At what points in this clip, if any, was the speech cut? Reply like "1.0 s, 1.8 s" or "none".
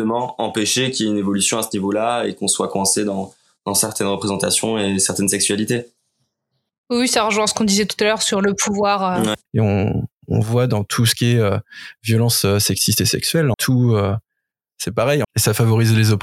9.5 s, 13.5 s, 15.2 s

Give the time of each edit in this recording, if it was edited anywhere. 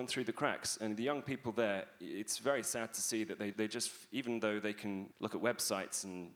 3.5 s, 5.1 s

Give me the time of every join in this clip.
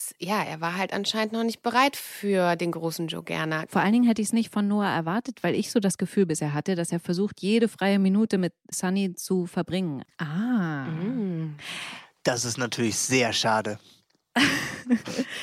3.7 s, 8.7 s, 10.0 s

